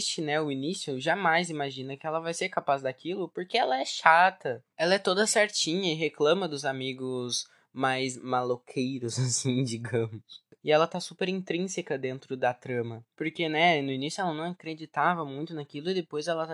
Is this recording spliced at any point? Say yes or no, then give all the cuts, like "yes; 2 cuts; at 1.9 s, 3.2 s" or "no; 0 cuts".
no; 0 cuts